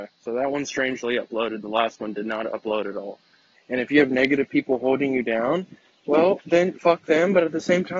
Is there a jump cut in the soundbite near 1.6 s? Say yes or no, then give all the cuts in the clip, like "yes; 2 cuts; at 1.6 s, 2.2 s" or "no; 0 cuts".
no; 2 cuts; at 3.5 s, 6.7 s